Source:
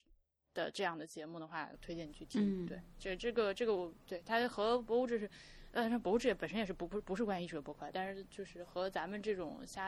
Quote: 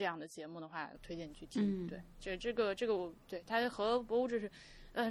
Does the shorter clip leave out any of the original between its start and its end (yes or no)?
no